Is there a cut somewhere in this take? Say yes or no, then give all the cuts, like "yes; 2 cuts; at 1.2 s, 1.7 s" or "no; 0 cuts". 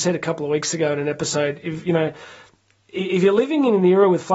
no; 0 cuts